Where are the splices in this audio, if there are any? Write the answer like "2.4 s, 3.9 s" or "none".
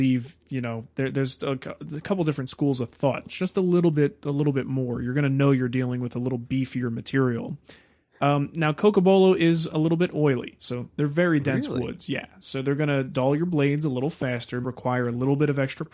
3.2 s, 10.6 s, 14.6 s